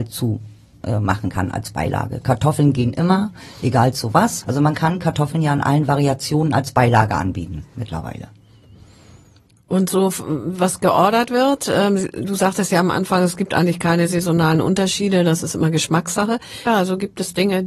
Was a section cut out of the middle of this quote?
yes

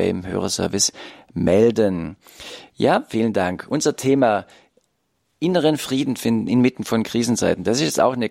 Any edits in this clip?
no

